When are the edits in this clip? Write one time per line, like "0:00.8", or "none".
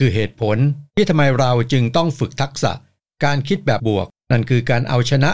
0:03.8

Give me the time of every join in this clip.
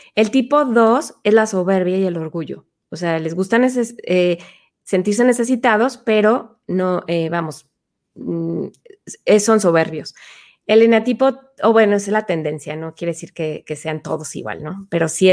none

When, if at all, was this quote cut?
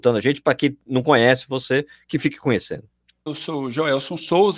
0:03.3

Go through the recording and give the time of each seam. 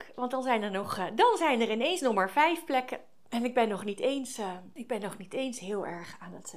none

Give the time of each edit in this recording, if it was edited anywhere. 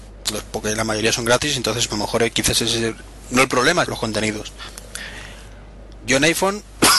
0:01.9
0:03.8

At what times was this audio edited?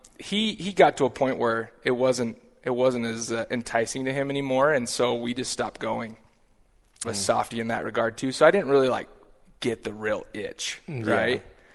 0:07.0

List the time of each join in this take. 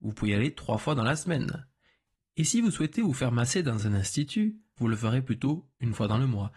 0:04.8

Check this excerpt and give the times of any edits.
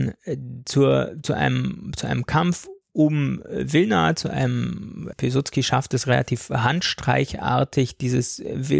0:05.1

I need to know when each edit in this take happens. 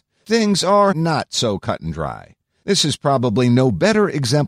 0:00.9

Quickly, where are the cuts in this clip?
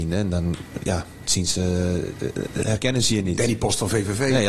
none

